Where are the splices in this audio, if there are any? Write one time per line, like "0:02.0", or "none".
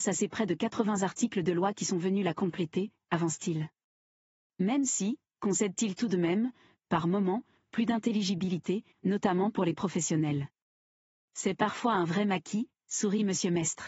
0:06.7
0:08.9